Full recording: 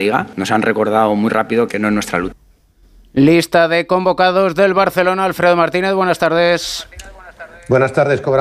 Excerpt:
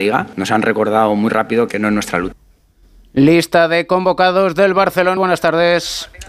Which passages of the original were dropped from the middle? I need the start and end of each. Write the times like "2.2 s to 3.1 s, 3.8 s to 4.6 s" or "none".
5.2 s to 5.9 s